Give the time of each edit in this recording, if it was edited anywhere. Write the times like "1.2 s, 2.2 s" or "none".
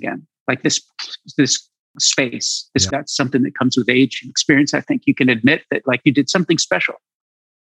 2.9 s